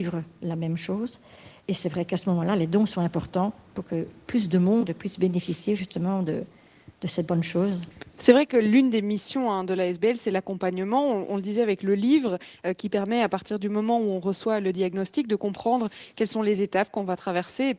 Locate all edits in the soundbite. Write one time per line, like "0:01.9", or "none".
none